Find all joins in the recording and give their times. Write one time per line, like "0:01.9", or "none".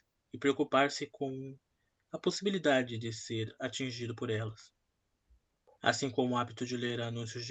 none